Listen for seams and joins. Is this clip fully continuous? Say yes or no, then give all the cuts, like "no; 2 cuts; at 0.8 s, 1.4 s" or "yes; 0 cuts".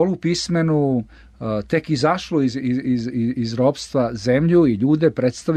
yes; 0 cuts